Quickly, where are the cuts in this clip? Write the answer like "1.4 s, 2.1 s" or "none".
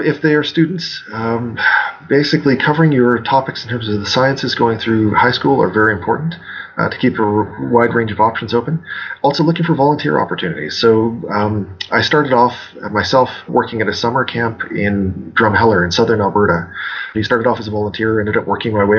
13.5 s, 17.1 s